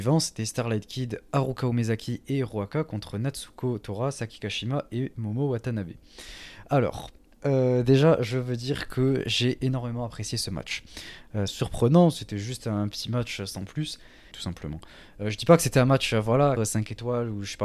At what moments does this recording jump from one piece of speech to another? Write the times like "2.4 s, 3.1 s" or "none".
11.5 s, 14.3 s, 16.6 s